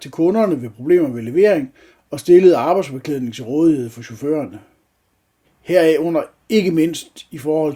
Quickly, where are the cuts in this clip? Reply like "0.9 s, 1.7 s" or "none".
5.4 s